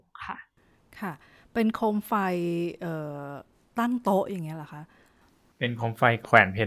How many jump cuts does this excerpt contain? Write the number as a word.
zero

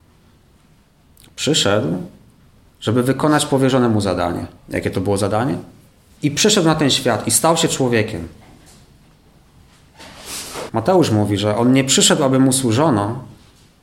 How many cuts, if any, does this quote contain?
three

